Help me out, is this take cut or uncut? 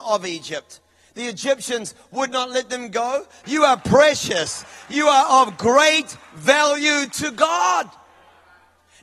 cut